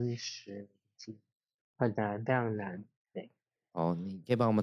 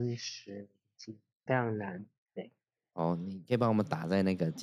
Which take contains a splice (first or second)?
second